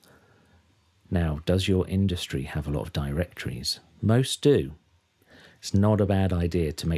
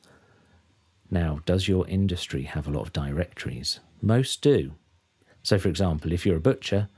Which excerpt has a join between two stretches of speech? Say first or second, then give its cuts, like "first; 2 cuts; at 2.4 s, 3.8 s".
second; 1 cut; at 5.3 s